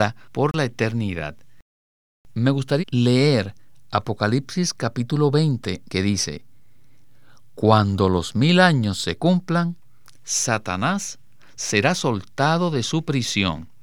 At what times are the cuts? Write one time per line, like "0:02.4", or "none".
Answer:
0:02.8
0:05.9